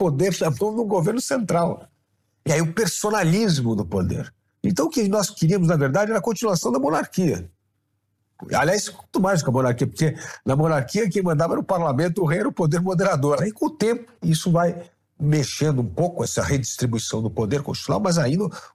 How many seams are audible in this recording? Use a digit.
2